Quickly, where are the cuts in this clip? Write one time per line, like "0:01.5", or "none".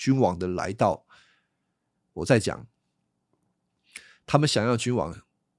none